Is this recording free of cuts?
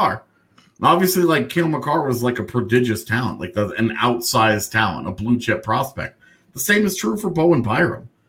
yes; 0 cuts

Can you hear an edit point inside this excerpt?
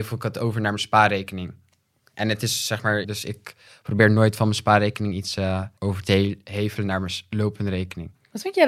yes; 2 cuts; at 3.0 s, 5.8 s

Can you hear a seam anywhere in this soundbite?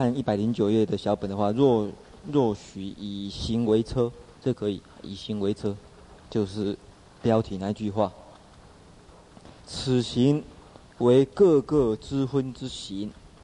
yes; 2 cuts; at 6.2 s, 9.6 s

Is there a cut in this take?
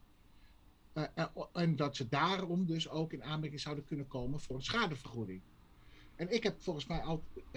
no; 0 cuts

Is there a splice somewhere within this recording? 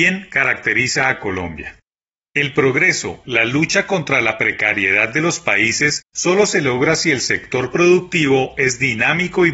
yes; 1 cut; at 3.2 s

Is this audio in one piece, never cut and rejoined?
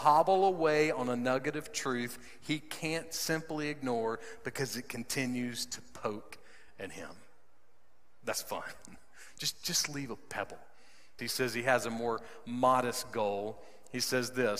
no; 1 cut; at 11.2 s

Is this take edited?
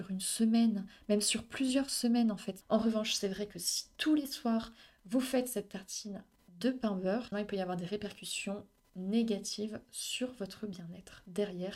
yes; 2 cuts; at 2.6 s, 7.3 s

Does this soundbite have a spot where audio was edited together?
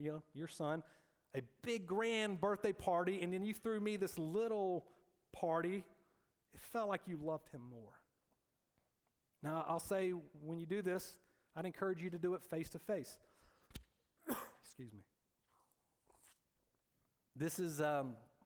no; 0 cuts

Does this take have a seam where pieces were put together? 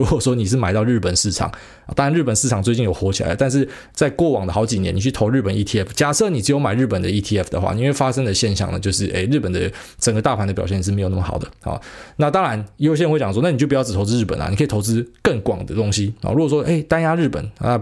no; 0 cuts

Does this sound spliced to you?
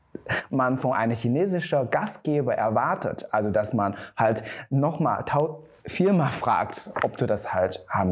no; 0 cuts

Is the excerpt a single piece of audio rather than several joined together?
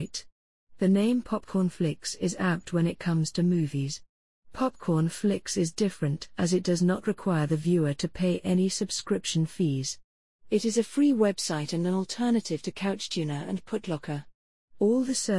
yes; 0 cuts

